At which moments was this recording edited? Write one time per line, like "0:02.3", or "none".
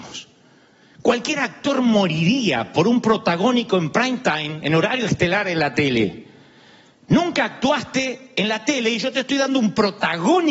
none